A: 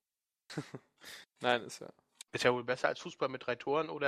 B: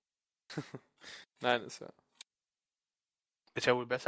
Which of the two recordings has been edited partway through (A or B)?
A